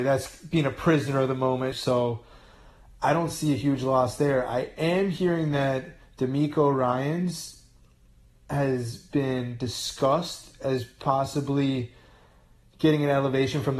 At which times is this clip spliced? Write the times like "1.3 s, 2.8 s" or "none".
1.7 s

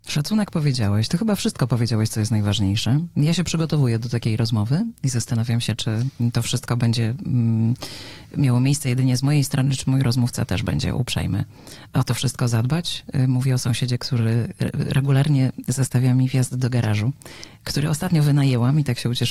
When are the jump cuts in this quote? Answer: none

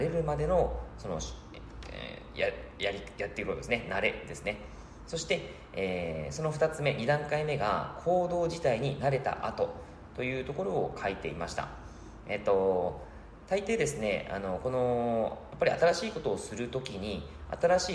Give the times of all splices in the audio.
none

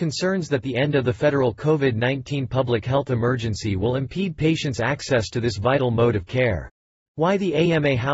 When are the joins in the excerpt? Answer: 7.0 s

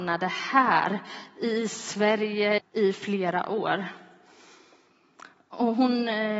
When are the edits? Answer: 2.6 s

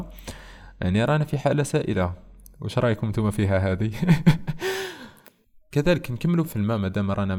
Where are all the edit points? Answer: 6.4 s

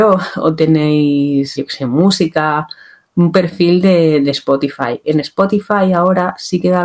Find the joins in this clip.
1.6 s

